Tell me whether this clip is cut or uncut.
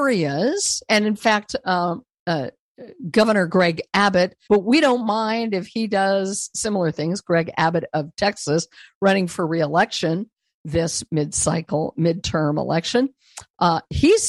cut